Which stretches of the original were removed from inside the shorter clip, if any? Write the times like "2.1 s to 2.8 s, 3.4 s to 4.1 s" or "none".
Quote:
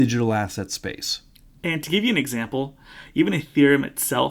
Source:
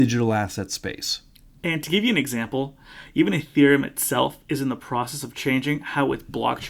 none